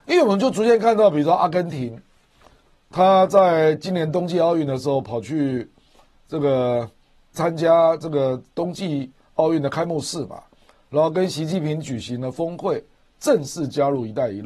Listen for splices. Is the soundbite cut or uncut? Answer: cut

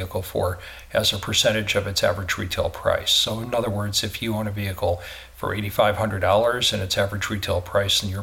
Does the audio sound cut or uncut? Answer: uncut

